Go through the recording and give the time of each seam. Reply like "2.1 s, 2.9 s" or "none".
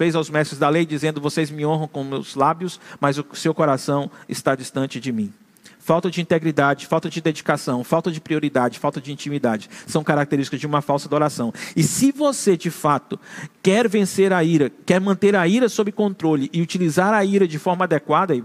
none

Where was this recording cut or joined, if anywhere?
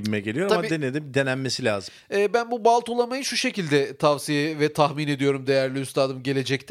none

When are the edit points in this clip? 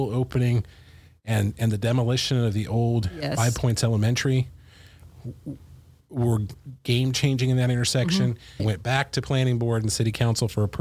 8.6 s

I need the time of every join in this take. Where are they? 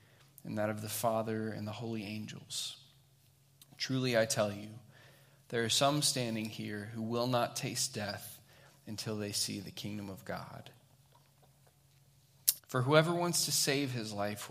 12.6 s

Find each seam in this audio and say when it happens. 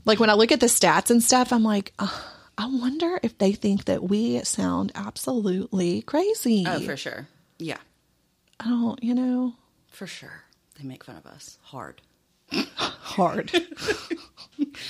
none

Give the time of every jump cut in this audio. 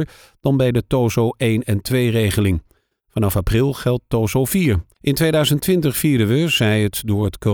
4.9 s

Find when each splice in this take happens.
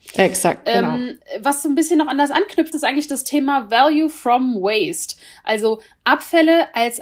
2.7 s

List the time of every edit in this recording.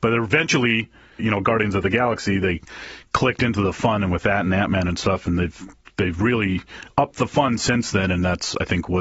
1.2 s

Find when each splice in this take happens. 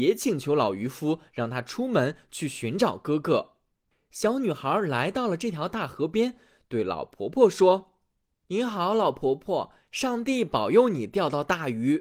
none

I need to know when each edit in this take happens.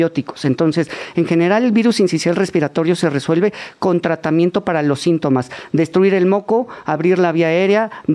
none

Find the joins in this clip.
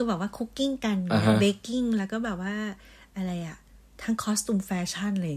none

